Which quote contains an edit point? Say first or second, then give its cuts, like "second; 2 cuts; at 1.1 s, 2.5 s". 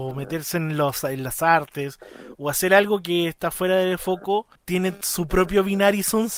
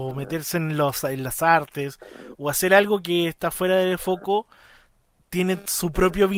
first; 1 cut; at 4.6 s